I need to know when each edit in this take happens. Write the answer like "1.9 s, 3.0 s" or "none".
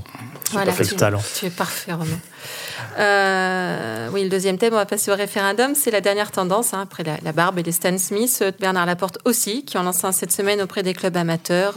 8.5 s